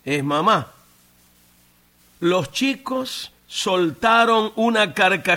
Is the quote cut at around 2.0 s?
yes; 1 cut; at 2.0 s

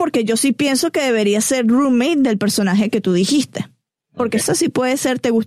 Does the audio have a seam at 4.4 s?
yes; 1 cut; at 4.4 s

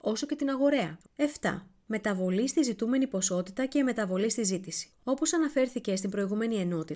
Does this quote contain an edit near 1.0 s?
yes; 1 cut; at 1.0 s

